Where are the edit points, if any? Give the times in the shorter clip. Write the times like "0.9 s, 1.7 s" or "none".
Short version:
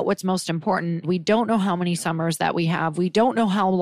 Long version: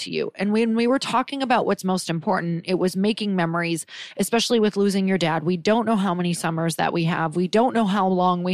1.0 s